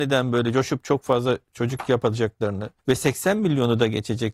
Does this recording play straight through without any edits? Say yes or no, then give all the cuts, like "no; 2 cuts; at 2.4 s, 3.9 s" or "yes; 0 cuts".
no; 1 cut; at 2.8 s